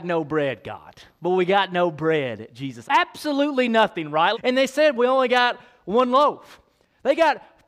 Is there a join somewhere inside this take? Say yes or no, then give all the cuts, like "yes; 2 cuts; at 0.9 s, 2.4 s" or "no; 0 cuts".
yes; 2 cuts; at 2.8 s, 4.3 s